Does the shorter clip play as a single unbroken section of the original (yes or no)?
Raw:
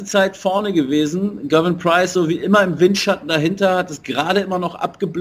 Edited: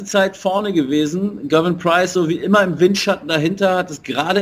yes